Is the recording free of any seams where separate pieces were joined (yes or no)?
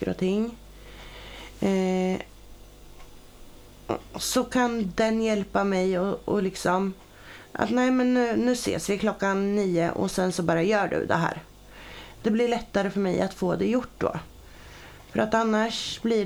yes